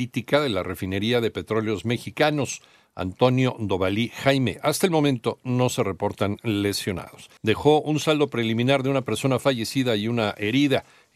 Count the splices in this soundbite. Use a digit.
1